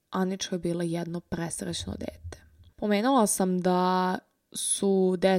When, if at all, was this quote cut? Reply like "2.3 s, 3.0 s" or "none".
2.7 s